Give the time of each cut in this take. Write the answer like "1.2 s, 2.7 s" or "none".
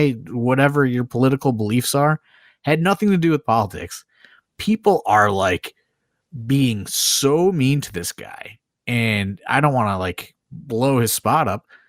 none